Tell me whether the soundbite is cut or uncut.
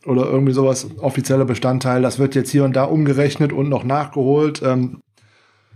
uncut